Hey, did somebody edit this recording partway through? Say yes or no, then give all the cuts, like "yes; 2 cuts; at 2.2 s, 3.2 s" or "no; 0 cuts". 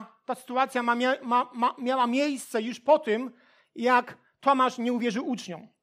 no; 0 cuts